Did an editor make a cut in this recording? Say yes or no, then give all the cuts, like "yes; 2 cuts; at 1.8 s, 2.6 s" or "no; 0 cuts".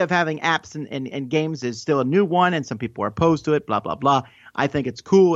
no; 0 cuts